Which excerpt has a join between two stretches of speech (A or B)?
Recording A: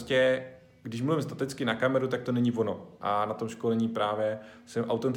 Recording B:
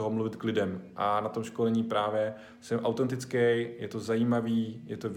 A